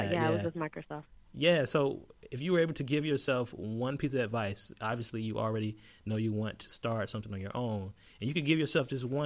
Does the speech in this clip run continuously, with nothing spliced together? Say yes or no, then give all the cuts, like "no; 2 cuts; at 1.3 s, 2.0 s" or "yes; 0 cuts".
no; 1 cut; at 4.7 s